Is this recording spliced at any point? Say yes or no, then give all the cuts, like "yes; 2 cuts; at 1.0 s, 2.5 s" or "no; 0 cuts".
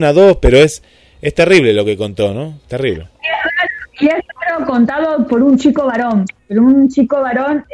yes; 1 cut; at 6.4 s